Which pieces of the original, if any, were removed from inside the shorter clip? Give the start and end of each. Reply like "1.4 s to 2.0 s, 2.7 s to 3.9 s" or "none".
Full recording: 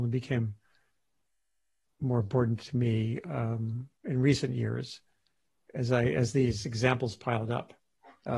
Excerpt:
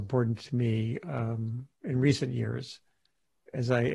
none